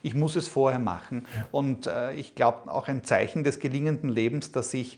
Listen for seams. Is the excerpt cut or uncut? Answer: cut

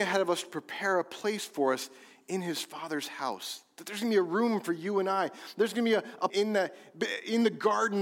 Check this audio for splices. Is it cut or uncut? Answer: cut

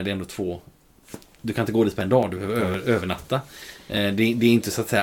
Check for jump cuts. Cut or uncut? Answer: uncut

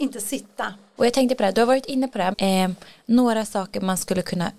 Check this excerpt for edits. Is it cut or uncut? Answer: cut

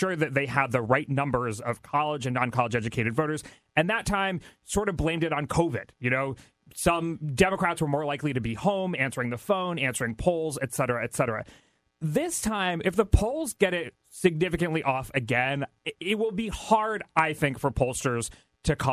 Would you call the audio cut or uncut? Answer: uncut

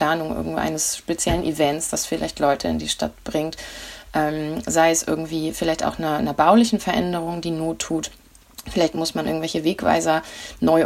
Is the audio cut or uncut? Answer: uncut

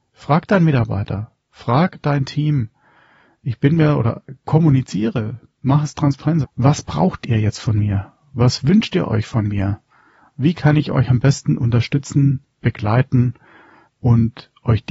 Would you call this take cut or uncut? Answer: cut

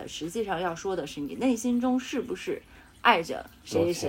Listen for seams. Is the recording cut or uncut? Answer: uncut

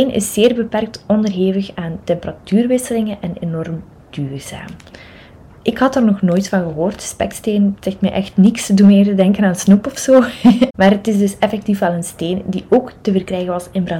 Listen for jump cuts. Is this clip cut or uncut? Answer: uncut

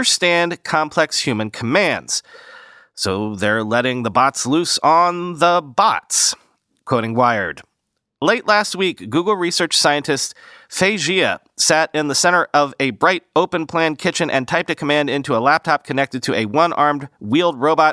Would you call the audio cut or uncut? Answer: uncut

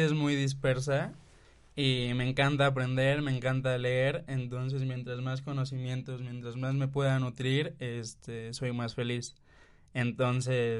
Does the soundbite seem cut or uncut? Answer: uncut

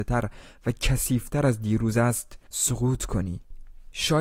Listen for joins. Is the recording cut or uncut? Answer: cut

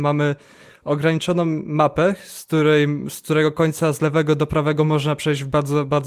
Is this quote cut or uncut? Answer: uncut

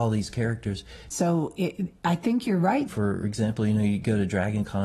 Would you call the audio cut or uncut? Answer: cut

